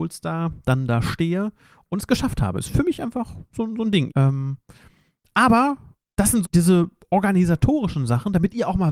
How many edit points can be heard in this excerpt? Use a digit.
2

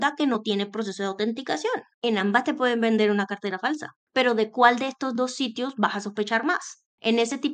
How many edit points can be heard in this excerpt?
0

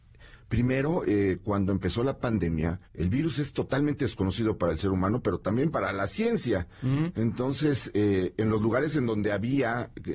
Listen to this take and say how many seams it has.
1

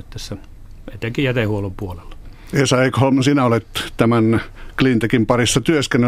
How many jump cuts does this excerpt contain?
0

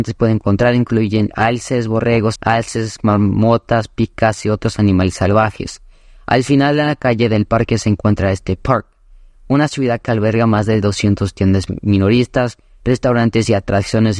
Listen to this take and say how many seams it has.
1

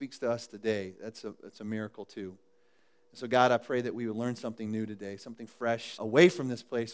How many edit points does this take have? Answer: 1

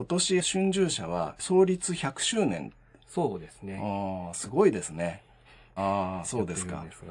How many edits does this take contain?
1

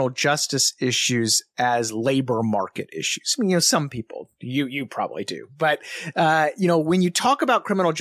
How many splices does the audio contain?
0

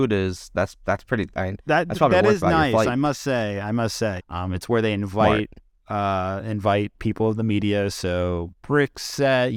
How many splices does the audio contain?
1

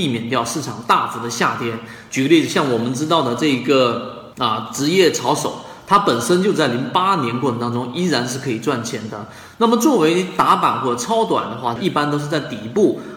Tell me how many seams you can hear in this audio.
2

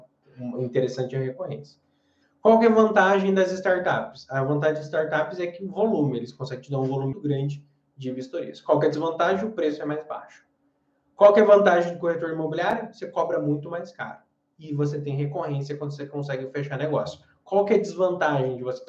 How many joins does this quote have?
1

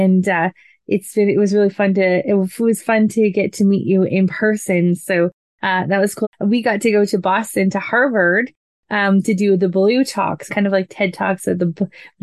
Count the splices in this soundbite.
2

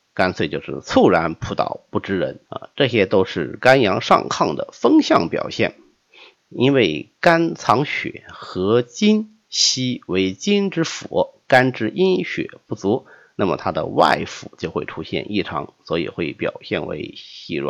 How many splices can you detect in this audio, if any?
2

